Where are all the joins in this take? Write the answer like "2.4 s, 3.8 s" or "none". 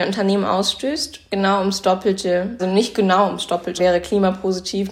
2.6 s, 3.8 s